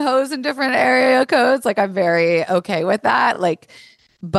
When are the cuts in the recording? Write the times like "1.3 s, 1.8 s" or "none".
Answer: none